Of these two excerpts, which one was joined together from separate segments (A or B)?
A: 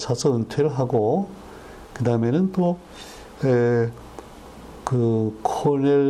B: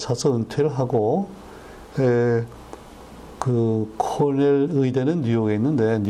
B